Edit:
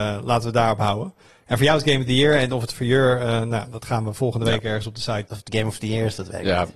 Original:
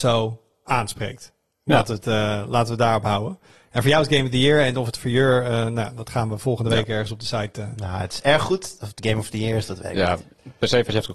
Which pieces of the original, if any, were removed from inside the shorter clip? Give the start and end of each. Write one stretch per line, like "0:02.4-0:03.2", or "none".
0:07.5-0:08.8